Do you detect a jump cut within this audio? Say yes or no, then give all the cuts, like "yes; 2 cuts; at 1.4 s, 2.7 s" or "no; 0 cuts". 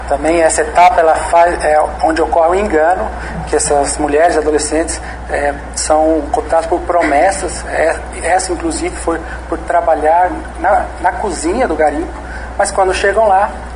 no; 0 cuts